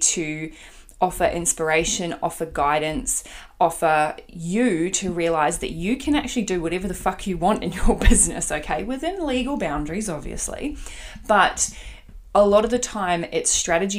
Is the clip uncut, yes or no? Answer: yes